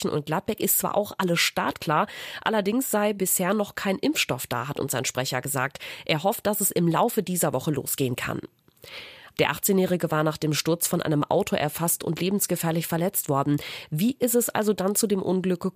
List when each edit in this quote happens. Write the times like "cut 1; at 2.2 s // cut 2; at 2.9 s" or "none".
cut 1; at 9.4 s